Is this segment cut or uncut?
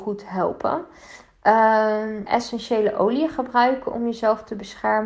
cut